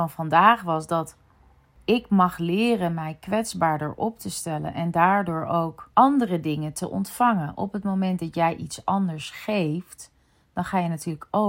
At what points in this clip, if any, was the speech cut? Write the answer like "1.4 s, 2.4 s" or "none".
none